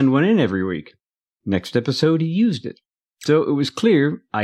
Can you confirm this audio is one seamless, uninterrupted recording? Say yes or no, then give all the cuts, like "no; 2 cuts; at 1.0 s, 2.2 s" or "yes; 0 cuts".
no; 1 cut; at 1.4 s